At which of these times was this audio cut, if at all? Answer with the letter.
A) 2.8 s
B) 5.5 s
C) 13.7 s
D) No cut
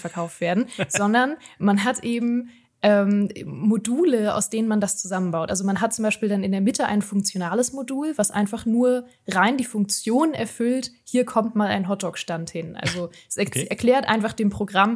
D